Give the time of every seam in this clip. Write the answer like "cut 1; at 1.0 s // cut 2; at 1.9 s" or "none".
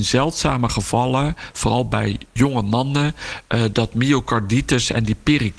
cut 1; at 2.4 s